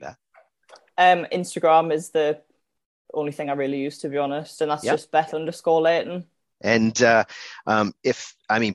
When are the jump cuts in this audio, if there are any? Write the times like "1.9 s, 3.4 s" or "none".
6.5 s